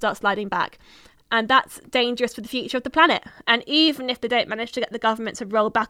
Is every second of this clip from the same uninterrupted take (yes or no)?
no